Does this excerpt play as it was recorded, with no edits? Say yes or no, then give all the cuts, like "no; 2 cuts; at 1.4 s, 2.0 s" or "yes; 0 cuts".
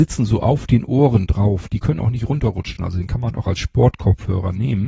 yes; 0 cuts